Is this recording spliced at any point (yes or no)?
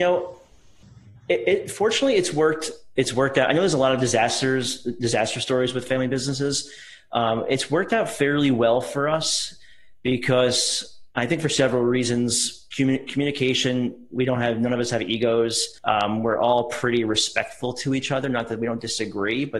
no